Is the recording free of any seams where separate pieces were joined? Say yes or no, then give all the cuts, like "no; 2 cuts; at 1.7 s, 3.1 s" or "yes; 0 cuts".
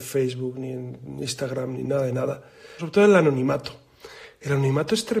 no; 1 cut; at 2.8 s